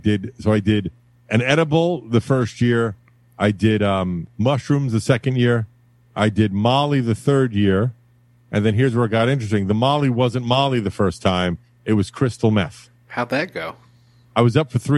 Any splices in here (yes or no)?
no